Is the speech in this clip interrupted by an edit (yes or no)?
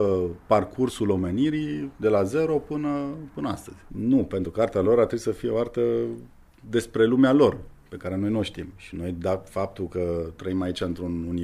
yes